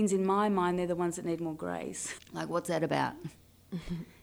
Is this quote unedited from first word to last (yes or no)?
no